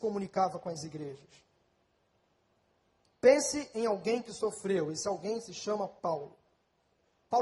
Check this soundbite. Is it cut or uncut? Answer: uncut